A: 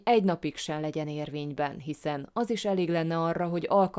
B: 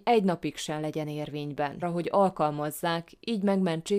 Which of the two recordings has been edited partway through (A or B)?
B